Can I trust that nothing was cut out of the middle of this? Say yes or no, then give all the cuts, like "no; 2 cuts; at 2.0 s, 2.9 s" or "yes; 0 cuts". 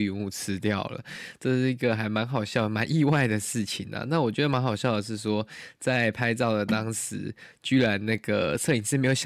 yes; 0 cuts